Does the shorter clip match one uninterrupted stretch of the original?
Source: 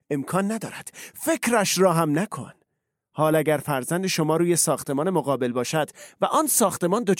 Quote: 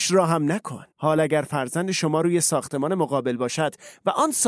no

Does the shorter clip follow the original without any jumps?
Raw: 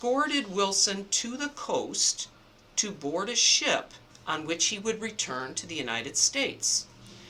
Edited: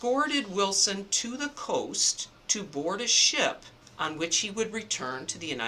no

